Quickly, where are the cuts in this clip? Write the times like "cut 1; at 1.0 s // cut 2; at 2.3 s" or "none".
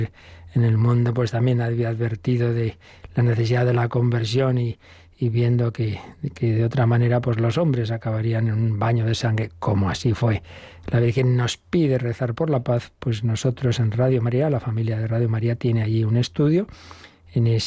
none

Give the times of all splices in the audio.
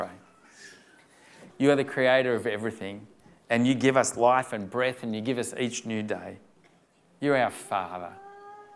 cut 1; at 1.5 s

